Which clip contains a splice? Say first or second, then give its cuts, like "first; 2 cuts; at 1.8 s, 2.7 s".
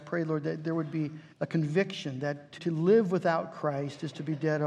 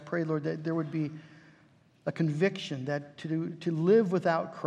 first; 2 cuts; at 1.3 s, 2.6 s